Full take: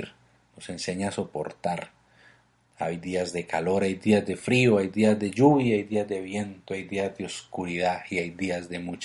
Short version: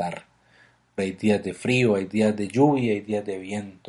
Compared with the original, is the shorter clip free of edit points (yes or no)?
no